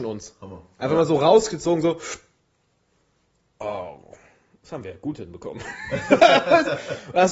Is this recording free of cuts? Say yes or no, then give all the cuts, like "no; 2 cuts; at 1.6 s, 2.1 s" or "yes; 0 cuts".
yes; 0 cuts